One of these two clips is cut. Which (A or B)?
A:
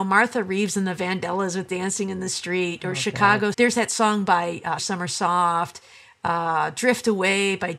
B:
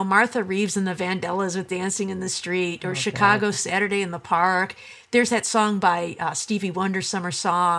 A